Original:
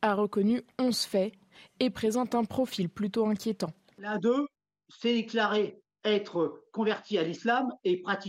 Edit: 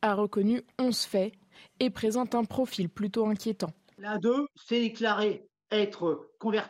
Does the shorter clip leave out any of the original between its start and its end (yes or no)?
yes